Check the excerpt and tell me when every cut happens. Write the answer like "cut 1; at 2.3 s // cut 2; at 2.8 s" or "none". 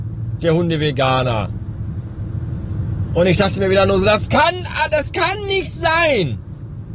none